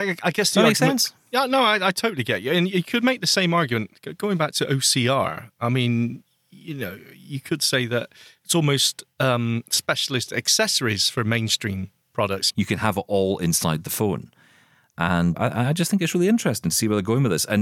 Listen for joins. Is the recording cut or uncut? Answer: cut